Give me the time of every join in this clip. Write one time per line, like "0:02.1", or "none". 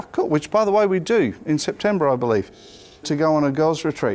0:03.0